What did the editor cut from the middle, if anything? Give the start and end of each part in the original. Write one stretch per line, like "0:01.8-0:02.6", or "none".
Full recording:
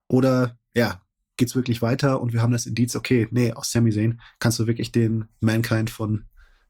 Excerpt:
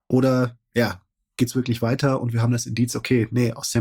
none